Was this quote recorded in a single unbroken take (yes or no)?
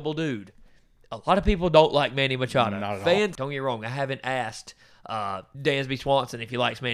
no